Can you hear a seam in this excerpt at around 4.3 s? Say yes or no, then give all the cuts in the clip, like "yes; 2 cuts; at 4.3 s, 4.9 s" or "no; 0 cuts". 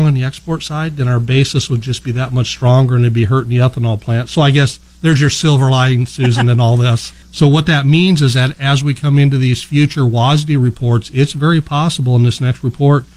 no; 1 cut; at 7.2 s